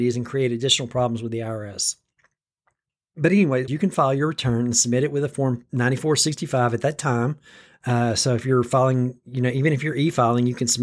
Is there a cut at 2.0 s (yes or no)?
no